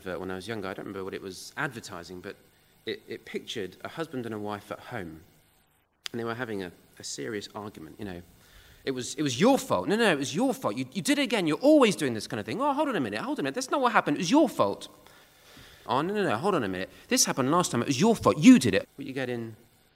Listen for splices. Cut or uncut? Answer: cut